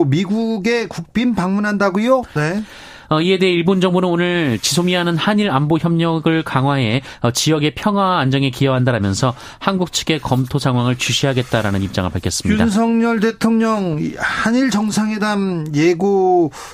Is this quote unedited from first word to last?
no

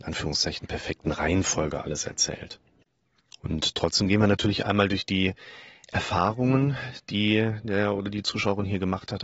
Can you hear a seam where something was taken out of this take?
no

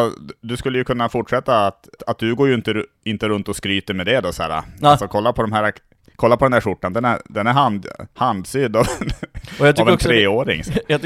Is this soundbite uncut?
no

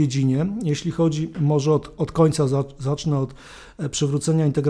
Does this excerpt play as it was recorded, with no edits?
yes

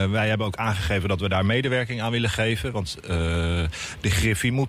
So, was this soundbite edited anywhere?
no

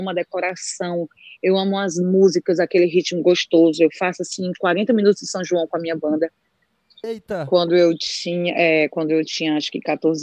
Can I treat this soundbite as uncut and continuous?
no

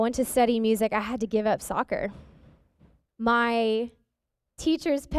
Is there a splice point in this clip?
yes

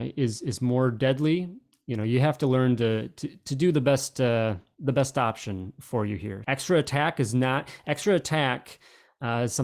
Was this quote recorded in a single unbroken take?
no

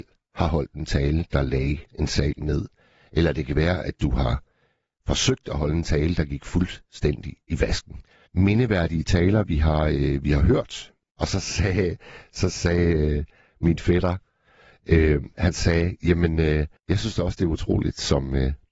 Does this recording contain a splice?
yes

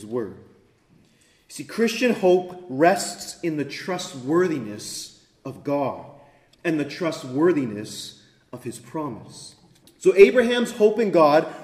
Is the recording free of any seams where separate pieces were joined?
no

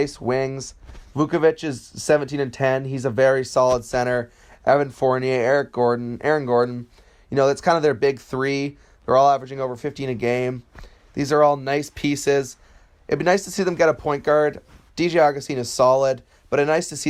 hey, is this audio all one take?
yes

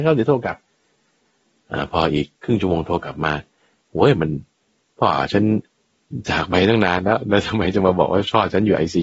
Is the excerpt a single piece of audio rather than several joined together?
yes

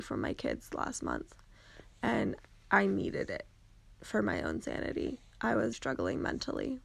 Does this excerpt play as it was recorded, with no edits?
no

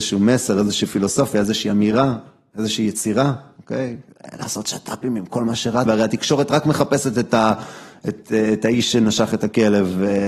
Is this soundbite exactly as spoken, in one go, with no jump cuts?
no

